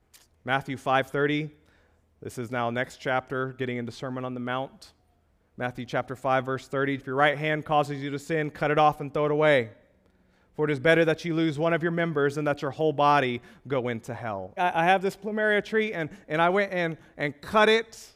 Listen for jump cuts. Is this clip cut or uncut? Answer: cut